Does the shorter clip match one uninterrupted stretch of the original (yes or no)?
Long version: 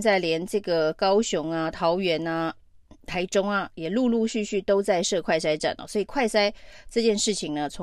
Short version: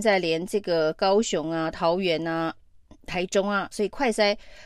no